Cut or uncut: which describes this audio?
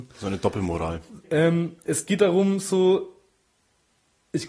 cut